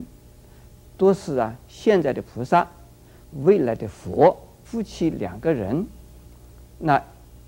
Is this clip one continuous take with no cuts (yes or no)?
no